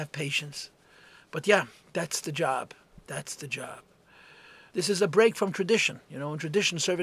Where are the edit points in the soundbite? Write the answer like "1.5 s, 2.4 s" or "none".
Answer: 4.7 s